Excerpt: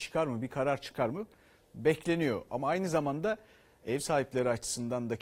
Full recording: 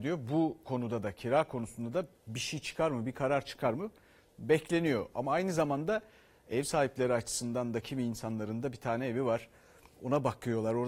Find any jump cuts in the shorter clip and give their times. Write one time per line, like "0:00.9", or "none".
none